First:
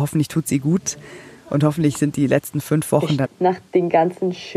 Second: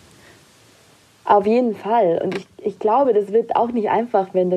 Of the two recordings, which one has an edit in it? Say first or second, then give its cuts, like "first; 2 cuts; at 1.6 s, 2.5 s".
first; 1 cut; at 3.2 s